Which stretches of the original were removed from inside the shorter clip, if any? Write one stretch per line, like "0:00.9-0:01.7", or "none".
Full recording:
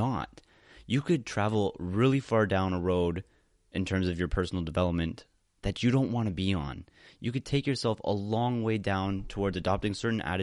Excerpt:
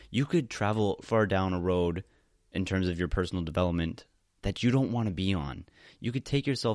0:01.8-0:02.2